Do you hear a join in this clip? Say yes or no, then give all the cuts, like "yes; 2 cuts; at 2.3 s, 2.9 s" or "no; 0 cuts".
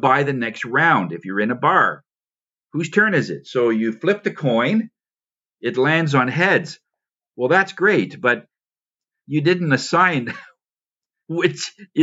no; 0 cuts